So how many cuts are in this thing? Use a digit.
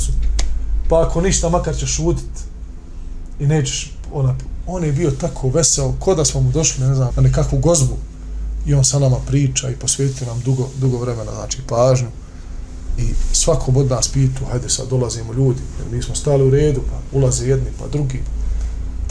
1